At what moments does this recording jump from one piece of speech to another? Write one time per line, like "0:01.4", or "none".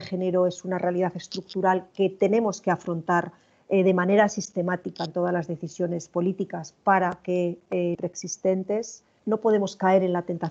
0:07.9